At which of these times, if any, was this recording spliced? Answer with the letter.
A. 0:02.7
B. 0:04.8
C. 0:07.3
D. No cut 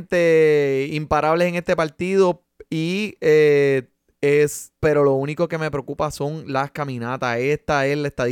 B